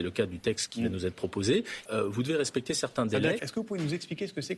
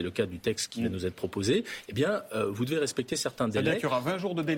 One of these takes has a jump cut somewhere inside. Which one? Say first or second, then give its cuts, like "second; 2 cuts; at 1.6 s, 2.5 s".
first; 2 cuts; at 1.9 s, 3.4 s